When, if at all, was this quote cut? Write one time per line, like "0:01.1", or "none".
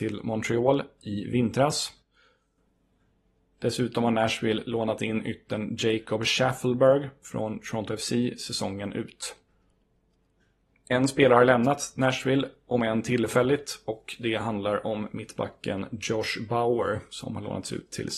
none